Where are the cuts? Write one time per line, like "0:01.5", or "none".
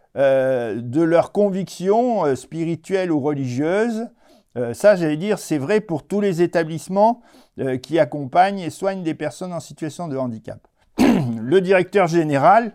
0:10.8

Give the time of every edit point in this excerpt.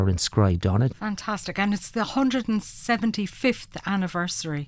0:00.9

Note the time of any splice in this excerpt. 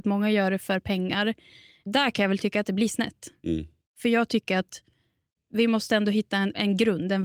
none

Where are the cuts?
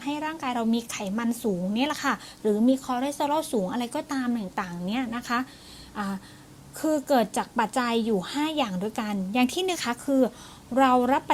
0:07.7
0:09.7

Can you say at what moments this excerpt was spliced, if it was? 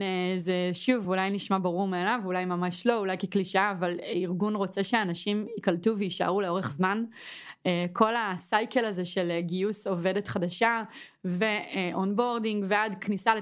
none

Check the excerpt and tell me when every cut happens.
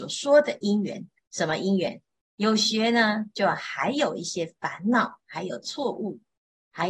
0:02.2

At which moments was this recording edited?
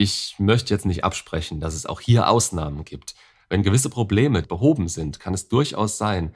0:03.3
0:04.4

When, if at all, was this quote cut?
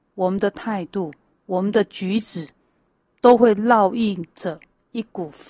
none

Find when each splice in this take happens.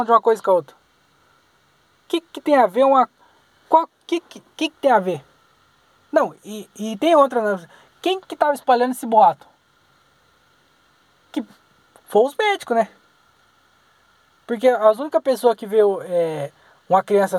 none

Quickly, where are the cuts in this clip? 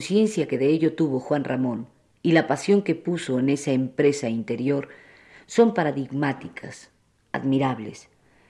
none

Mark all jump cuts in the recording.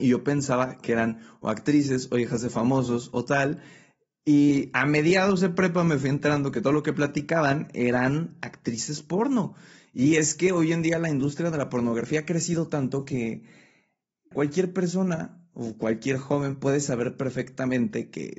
0:14.3

